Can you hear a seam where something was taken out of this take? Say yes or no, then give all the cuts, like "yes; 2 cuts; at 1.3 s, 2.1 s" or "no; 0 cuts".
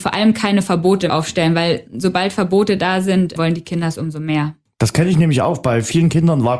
no; 0 cuts